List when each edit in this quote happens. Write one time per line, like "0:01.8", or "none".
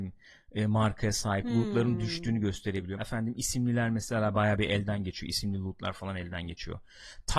0:03.0